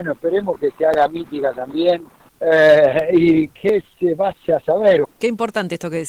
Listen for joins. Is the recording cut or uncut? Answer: cut